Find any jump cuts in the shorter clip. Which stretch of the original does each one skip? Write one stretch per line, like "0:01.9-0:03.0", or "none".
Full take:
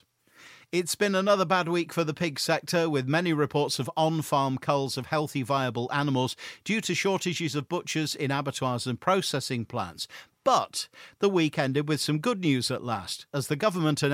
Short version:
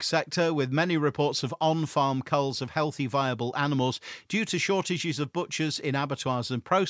none